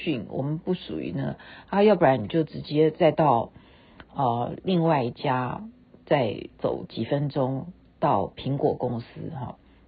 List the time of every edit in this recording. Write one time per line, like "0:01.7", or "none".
none